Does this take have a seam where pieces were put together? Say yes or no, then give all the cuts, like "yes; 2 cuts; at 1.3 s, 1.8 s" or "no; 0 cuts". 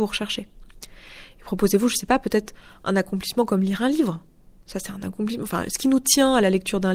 no; 0 cuts